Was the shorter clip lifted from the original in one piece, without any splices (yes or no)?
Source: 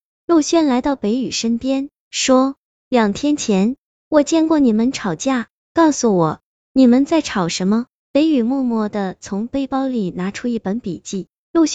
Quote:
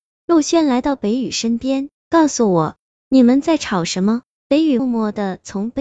no